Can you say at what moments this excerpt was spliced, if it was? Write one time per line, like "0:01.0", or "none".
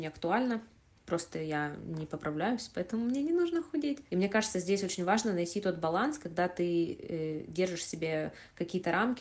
0:04.1